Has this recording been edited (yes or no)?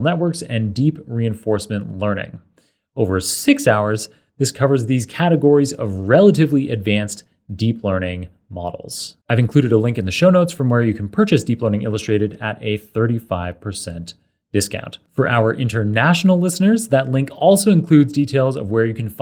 yes